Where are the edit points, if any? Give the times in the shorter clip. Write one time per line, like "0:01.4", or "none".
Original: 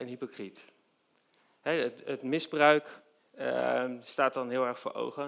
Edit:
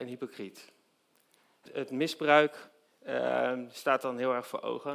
0:01.7